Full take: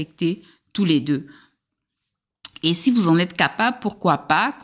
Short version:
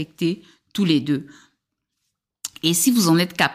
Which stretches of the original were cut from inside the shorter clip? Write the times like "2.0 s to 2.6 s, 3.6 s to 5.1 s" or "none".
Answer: none